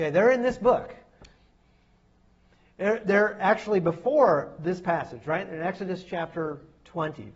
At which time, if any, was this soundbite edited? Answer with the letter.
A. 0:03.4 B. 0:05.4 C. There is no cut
C